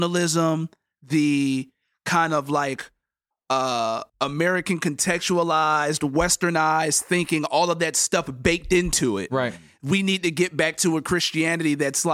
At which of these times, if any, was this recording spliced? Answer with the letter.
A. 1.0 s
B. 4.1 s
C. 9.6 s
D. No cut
B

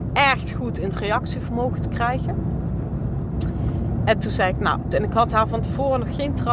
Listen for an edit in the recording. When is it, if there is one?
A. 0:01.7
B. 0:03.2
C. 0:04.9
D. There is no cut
C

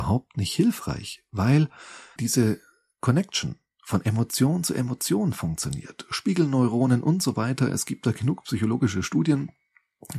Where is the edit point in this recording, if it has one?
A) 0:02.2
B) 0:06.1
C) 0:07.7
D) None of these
A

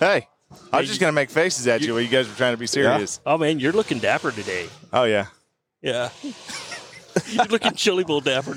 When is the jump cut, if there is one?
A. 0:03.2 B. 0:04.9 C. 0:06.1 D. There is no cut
D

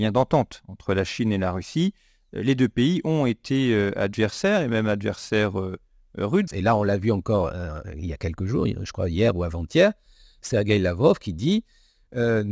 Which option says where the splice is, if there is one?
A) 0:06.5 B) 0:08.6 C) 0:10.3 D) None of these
A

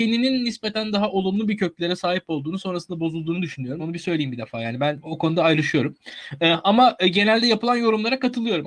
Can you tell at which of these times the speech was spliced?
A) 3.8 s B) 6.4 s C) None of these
A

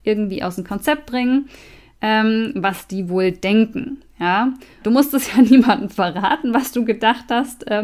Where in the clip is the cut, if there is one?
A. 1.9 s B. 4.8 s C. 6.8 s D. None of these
B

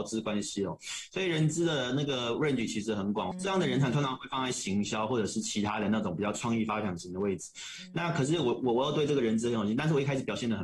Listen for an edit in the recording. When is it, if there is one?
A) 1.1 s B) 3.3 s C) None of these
B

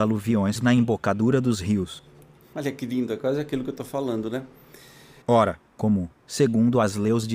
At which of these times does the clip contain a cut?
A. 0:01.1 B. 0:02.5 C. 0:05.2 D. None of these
C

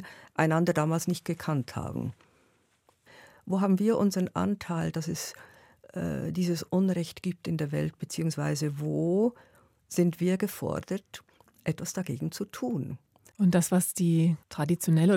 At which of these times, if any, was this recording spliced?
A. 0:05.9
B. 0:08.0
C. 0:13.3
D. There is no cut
C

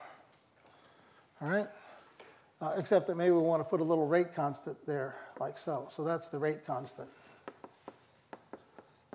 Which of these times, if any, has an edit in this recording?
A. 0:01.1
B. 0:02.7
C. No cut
C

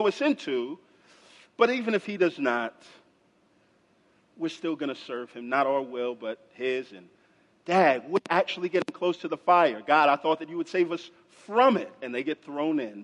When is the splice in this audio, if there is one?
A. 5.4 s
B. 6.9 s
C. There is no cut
C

